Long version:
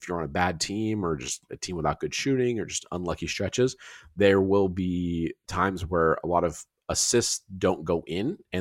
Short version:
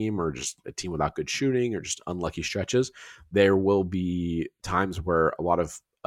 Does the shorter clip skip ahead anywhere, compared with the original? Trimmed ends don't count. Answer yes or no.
no